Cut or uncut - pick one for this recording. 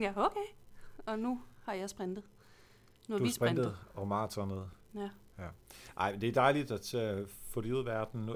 uncut